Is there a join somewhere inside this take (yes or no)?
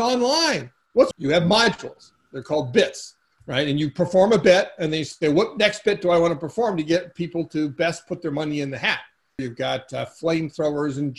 yes